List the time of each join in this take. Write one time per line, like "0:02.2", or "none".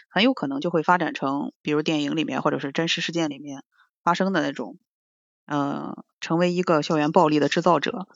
0:01.6